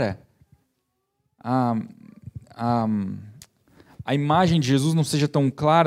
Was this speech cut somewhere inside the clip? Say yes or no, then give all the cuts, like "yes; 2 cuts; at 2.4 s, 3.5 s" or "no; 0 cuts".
no; 0 cuts